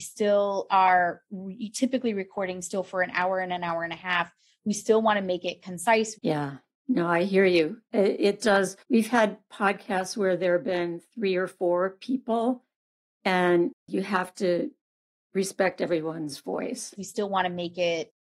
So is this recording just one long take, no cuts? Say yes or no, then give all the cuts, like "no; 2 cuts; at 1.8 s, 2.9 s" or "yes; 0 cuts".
no; 3 cuts; at 6.1 s, 8.8 s, 17.0 s